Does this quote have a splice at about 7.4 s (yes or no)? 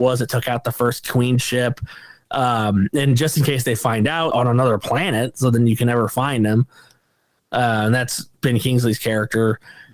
no